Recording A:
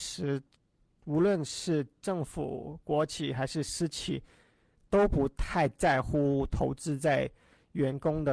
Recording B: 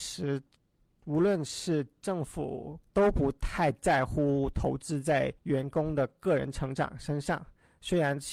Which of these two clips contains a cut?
B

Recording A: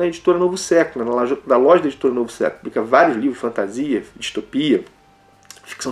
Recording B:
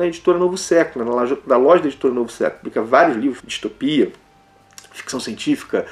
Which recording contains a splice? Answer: B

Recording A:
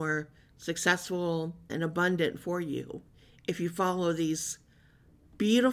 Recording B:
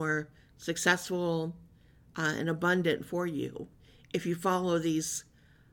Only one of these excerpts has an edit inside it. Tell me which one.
A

